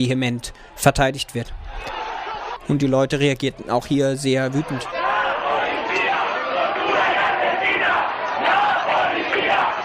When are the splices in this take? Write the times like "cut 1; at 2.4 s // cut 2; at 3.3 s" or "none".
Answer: cut 1; at 2.6 s